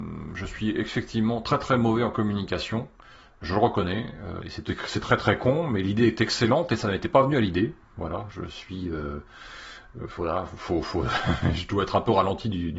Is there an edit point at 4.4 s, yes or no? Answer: yes